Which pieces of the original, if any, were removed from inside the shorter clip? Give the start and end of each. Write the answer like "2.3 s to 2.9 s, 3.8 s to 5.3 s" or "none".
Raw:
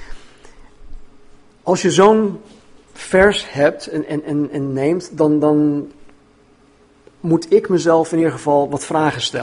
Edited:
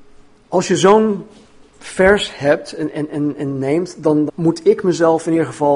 5.4 s to 7.1 s